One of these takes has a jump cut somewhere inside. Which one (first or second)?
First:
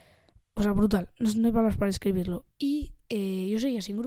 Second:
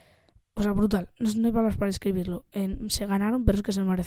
first